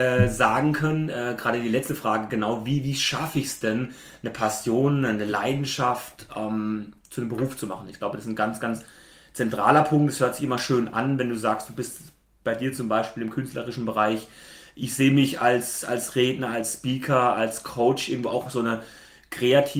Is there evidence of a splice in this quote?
no; 0 cuts

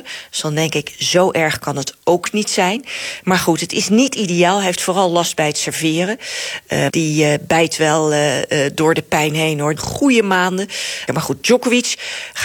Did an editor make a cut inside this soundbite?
yes; 3 cuts; at 6.9 s, 9.8 s, 11.1 s

